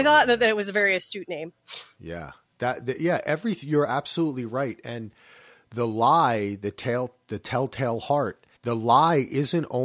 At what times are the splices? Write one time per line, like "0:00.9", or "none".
0:08.6

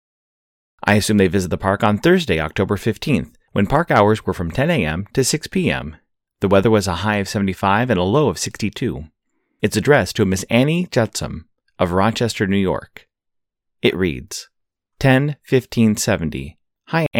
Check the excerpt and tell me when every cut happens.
none

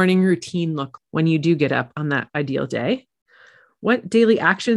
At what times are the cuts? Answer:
0:01.0
0:03.7

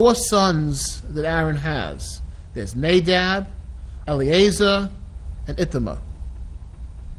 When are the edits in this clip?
0:04.0

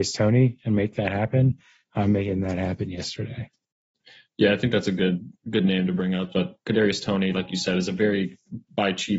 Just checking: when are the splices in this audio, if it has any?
0:06.3

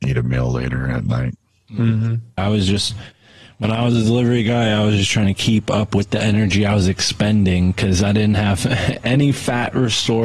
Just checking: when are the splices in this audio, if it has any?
0:02.4

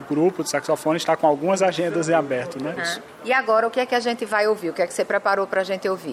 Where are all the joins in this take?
0:02.8

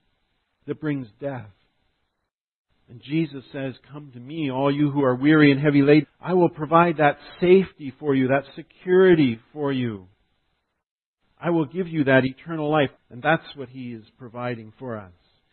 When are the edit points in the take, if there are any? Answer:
0:06.0
0:13.0

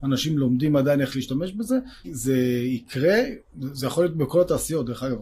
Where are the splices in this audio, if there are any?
0:02.0
0:03.5

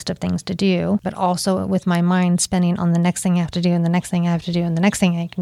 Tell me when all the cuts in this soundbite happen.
0:01.0

